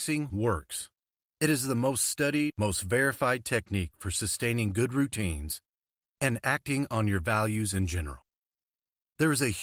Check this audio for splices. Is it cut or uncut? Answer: cut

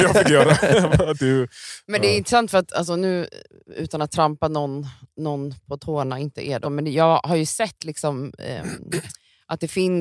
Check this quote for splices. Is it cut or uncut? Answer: cut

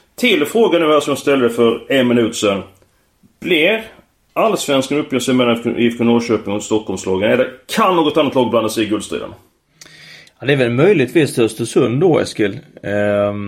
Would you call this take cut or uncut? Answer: uncut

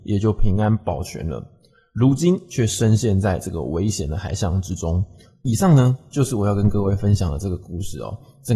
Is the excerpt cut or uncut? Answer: uncut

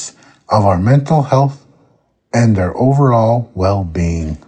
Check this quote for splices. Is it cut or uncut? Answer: uncut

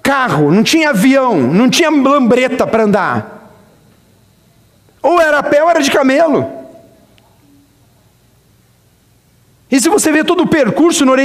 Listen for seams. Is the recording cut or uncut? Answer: uncut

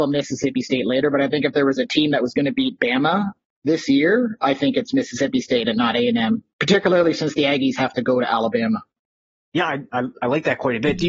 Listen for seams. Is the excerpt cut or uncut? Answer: uncut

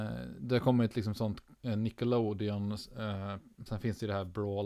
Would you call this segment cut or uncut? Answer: cut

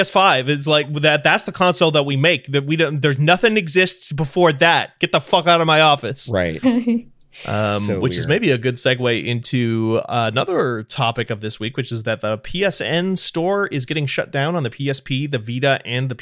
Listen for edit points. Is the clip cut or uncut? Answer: cut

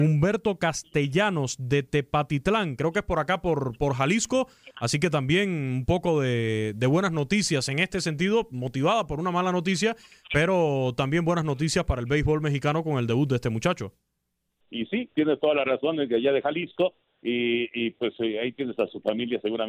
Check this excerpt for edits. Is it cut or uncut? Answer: cut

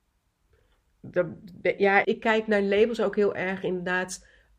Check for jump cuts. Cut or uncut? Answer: cut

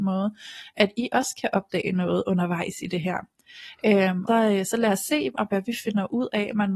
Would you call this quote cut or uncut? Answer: cut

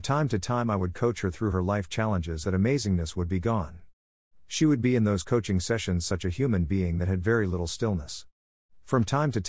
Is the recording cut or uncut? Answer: cut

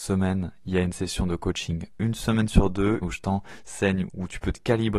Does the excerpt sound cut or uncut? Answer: cut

